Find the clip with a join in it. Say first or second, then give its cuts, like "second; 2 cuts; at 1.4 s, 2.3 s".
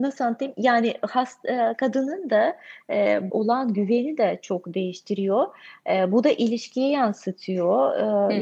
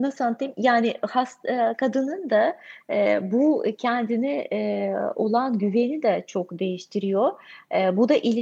first; 1 cut; at 3.3 s